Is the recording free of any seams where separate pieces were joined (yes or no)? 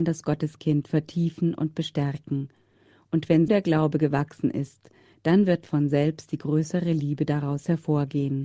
no